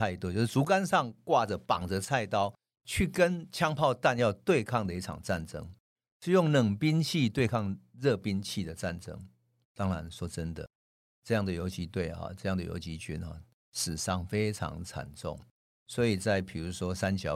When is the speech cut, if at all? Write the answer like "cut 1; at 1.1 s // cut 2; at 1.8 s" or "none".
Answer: cut 1; at 9.6 s